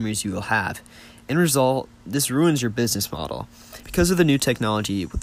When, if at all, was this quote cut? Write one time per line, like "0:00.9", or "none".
0:03.8

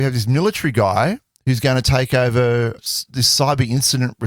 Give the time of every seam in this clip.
0:02.8

